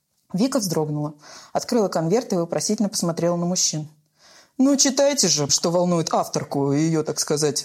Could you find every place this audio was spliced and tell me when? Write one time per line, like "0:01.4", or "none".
0:05.5

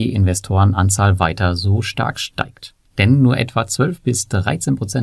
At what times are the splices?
none

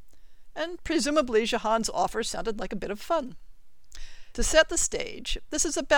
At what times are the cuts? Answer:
0:04.3

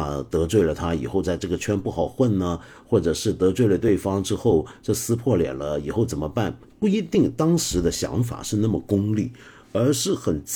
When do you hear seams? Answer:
none

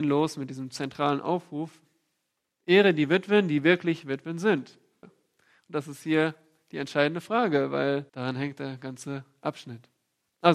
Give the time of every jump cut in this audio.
0:05.0
0:08.1

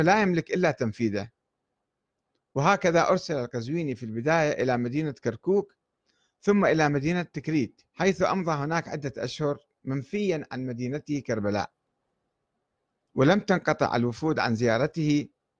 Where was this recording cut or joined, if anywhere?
0:07.9

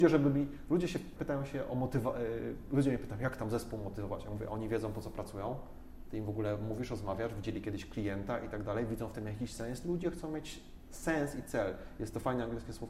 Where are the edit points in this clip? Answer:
0:01.2

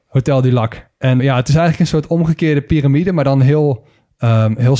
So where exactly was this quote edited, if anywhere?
0:01.2

